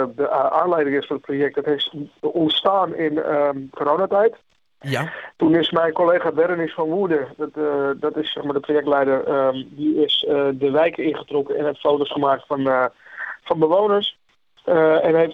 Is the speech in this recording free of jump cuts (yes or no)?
yes